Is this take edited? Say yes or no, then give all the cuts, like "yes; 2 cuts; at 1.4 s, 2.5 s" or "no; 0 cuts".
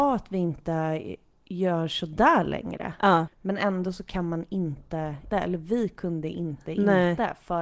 yes; 2 cuts; at 3.3 s, 5.3 s